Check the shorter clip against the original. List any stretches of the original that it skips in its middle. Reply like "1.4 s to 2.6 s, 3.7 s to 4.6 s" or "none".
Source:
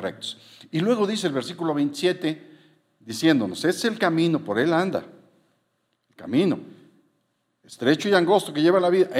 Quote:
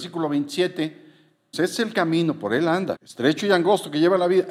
3.0 s to 3.6 s, 5.0 s to 7.6 s